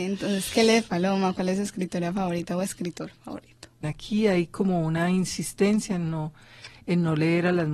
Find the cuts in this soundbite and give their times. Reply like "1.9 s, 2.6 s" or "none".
3.8 s